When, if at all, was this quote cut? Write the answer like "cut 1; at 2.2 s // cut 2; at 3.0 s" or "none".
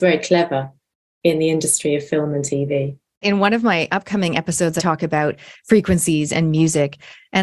cut 1; at 3.2 s // cut 2; at 4.8 s